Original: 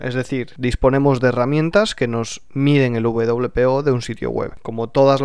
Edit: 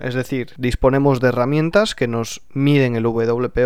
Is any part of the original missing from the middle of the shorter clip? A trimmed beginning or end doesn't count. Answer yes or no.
no